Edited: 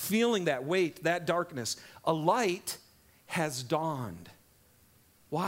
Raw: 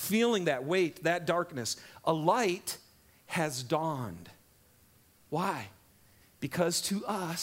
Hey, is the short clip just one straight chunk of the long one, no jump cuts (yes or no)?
yes